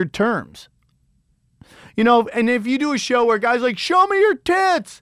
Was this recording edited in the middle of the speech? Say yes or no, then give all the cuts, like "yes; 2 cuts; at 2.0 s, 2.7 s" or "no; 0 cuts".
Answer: no; 0 cuts